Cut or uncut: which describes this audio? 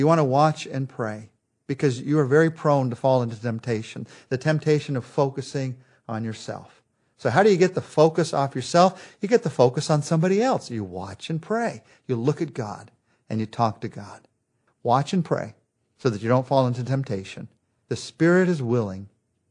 cut